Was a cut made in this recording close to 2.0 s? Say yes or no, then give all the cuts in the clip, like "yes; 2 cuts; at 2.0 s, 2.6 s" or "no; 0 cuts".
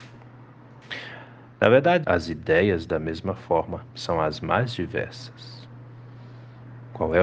yes; 1 cut; at 2.0 s